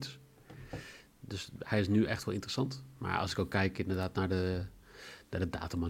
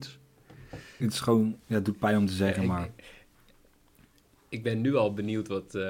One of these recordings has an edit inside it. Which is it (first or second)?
second